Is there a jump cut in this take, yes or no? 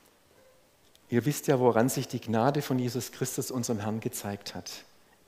no